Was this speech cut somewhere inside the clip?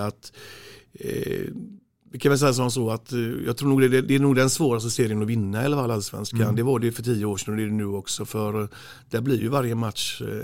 no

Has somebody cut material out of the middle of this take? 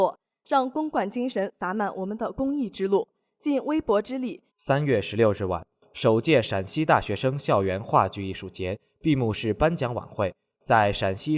yes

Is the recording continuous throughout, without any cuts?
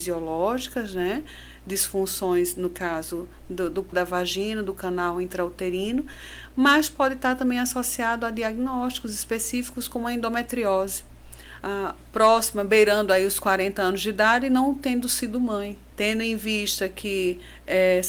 no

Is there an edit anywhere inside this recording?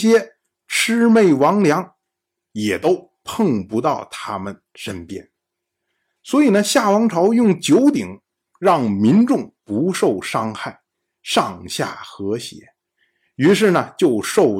no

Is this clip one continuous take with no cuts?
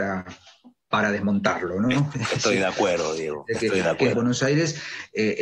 no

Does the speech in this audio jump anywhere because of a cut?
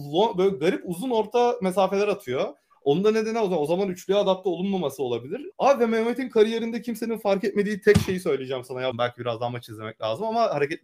yes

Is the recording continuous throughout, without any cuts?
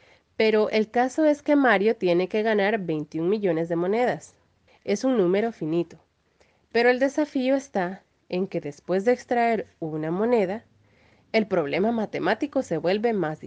no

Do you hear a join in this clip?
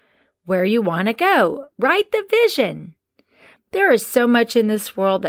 yes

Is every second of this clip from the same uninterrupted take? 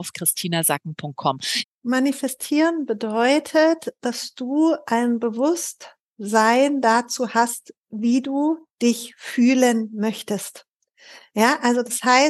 no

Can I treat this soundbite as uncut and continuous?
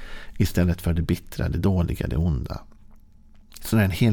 yes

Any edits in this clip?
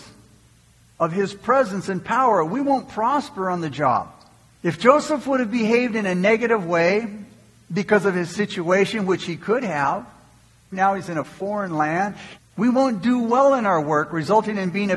yes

